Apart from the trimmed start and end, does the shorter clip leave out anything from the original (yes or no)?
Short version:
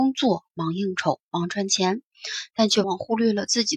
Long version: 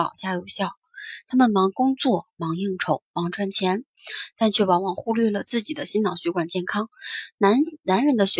yes